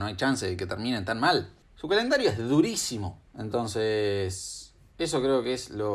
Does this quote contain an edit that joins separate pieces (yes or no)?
yes